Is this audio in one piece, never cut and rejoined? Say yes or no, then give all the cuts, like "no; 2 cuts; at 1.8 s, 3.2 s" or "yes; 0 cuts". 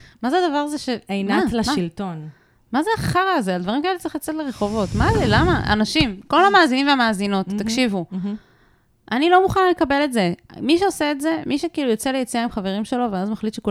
yes; 0 cuts